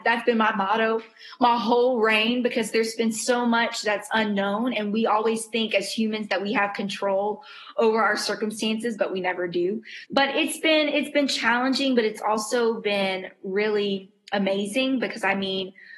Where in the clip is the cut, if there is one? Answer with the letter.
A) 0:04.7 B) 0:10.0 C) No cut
B